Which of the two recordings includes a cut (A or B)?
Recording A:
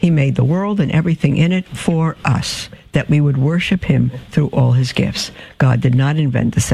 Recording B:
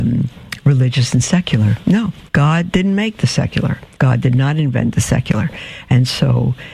B